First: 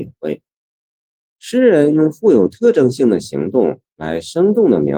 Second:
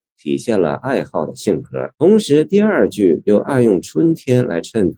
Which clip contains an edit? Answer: second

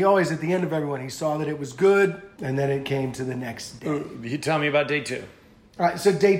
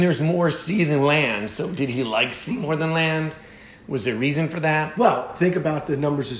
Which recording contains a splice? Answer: first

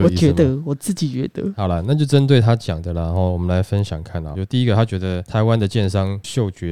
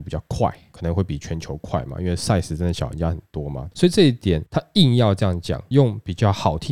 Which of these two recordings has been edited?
first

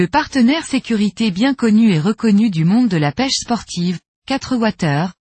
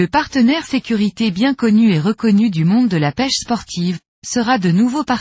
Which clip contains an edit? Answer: second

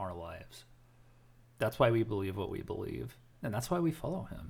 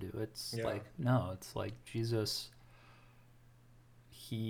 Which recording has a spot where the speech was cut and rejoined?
first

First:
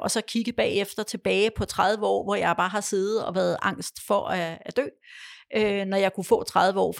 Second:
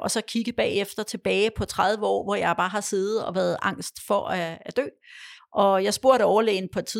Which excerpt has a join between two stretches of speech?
second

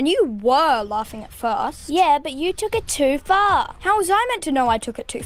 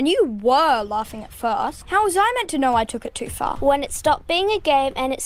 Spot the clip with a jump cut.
second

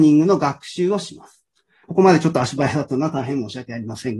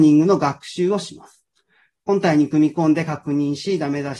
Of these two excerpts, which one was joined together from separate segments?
first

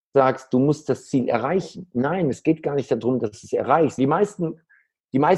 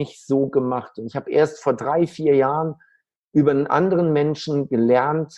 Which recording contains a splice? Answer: first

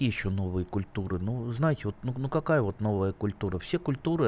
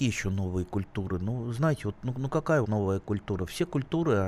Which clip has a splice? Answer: second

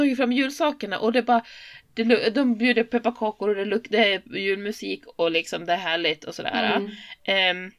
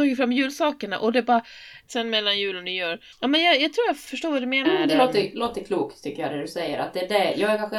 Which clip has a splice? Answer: second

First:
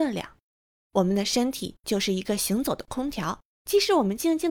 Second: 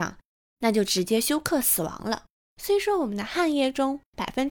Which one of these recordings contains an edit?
second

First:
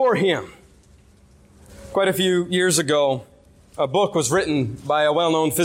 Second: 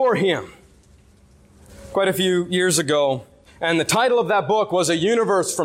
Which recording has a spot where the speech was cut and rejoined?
second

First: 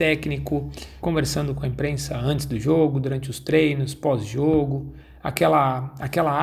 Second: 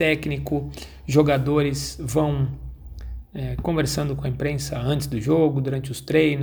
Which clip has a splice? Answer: first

